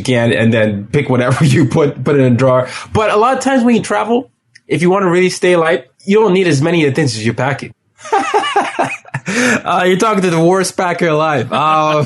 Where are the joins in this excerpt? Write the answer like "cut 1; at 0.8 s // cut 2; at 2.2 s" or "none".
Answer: cut 1; at 5.9 s // cut 2; at 7.7 s